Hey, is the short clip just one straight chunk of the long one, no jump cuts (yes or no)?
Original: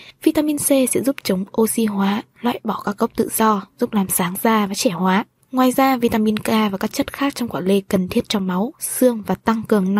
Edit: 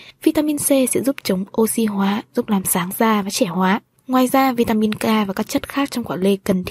no